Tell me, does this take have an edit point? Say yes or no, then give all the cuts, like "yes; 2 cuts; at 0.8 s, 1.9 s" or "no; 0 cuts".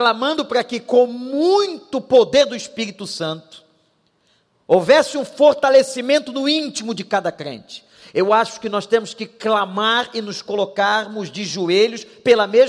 no; 0 cuts